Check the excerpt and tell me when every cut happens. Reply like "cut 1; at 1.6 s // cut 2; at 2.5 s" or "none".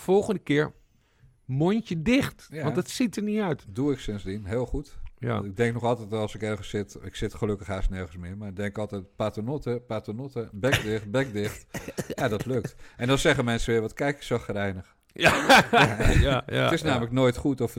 none

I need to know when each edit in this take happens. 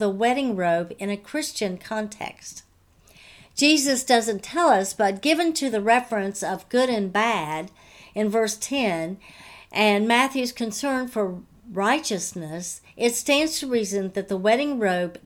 none

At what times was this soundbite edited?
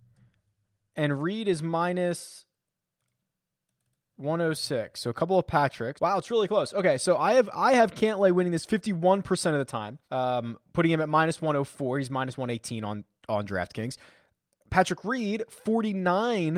cut 1; at 6.0 s // cut 2; at 10.0 s

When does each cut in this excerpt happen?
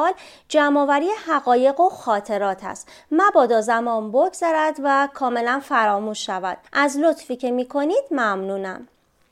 cut 1; at 6.7 s

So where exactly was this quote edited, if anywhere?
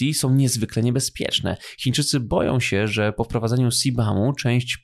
none

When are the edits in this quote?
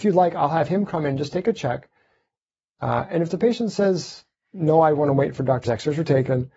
cut 1; at 5.6 s

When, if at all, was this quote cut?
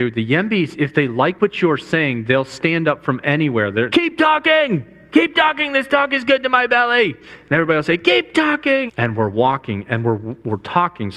cut 1; at 3.9 s // cut 2; at 8.9 s

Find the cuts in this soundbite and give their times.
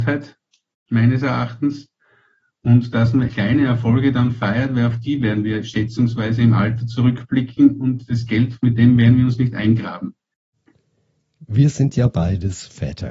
cut 1; at 3.3 s

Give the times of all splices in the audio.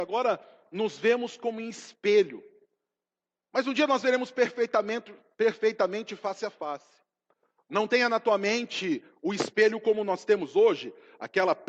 none

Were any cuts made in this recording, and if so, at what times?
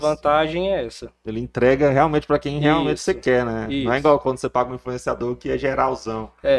none

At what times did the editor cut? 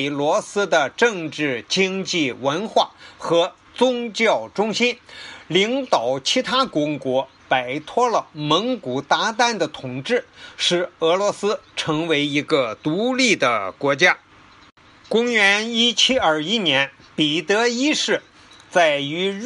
none

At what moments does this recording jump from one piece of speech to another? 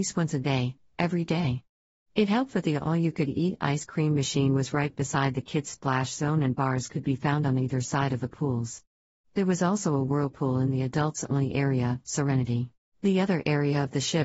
cut 1; at 12.8 s

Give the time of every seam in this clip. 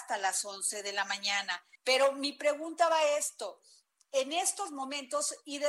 cut 1; at 1.8 s

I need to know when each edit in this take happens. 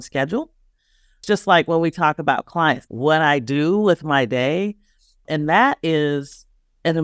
cut 1; at 2.9 s

